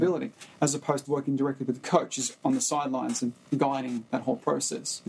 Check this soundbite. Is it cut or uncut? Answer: cut